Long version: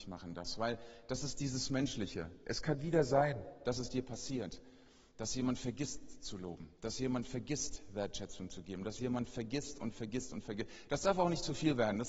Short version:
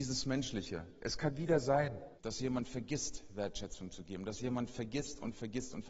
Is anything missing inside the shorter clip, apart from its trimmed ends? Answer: yes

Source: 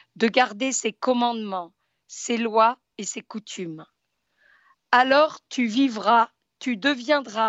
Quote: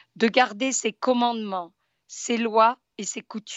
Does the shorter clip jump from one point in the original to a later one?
no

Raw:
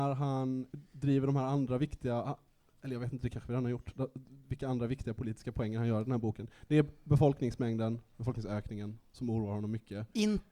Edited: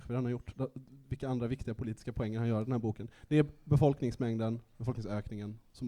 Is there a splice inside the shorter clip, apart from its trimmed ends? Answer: no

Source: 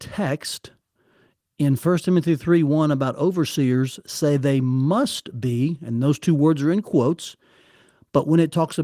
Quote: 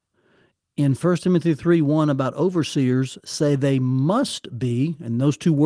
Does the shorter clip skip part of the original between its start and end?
no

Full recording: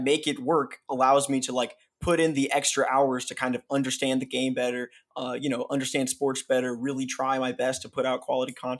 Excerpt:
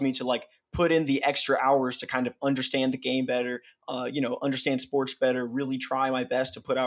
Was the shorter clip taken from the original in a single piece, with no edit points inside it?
yes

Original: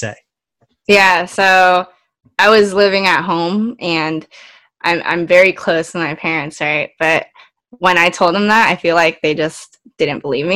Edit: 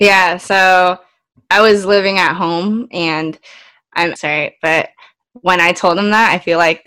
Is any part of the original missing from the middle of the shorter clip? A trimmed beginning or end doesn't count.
yes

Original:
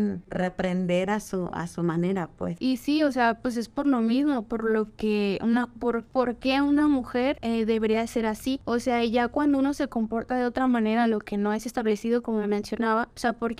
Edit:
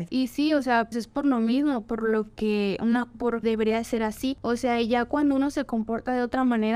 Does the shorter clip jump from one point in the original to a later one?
yes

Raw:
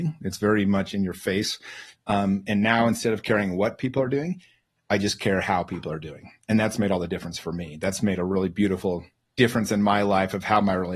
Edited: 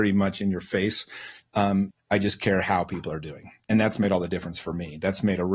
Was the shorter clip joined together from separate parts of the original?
yes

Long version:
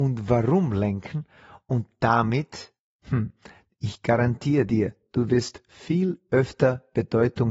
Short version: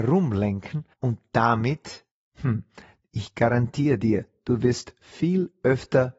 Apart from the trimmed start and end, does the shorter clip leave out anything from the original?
yes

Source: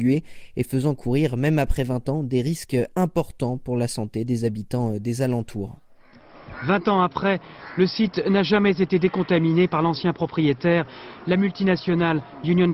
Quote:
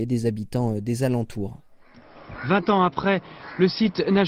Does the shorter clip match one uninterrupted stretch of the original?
yes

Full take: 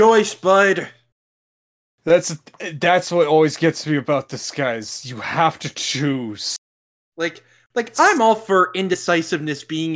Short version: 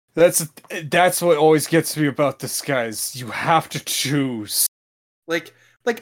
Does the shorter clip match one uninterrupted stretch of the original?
yes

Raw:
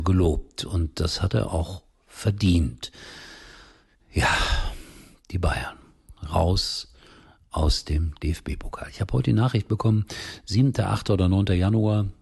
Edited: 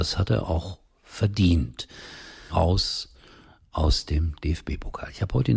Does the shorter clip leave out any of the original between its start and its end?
yes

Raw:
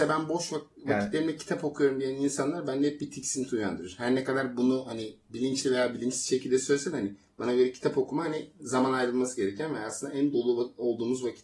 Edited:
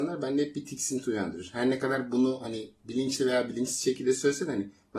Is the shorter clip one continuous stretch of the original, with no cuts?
yes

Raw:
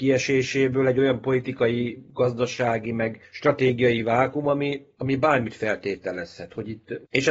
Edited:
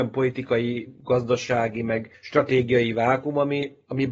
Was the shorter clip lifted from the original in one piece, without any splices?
yes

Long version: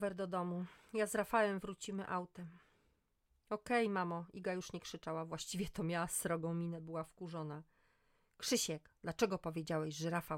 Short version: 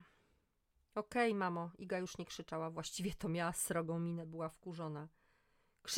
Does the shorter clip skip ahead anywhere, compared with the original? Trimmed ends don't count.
no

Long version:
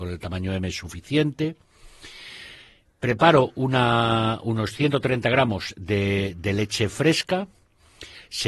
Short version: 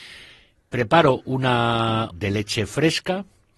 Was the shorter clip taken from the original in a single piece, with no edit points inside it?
no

